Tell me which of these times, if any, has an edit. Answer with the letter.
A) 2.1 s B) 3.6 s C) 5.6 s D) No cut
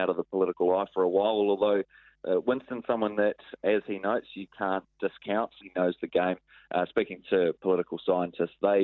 C